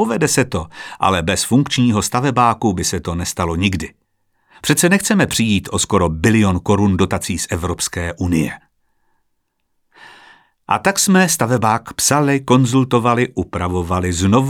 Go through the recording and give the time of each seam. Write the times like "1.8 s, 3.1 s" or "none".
none